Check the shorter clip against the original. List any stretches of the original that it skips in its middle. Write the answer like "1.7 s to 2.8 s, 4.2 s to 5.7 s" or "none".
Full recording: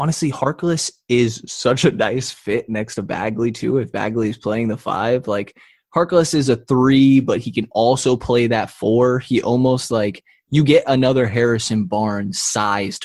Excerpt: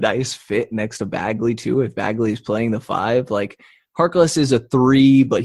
none

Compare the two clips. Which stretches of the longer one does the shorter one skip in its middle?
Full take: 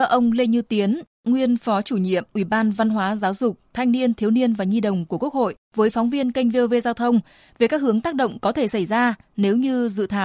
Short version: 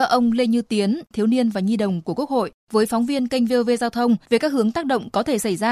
1.1 s to 4.1 s, 7.3 s to 7.5 s

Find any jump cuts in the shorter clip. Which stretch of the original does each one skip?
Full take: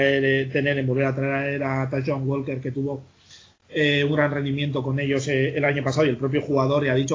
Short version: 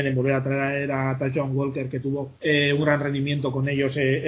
3.1 s to 3.7 s

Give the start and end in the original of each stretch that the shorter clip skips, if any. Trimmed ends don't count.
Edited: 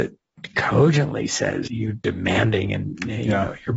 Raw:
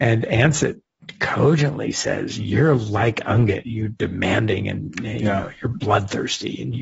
2.3 s to 3.6 s

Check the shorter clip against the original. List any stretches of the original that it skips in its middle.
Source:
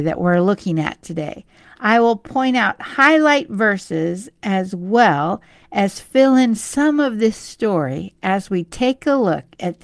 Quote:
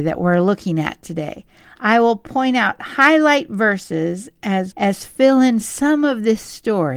4.7 s to 5.7 s

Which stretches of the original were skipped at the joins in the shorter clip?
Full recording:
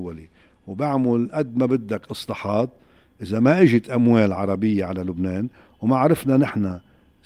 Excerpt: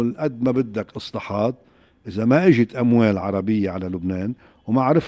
none

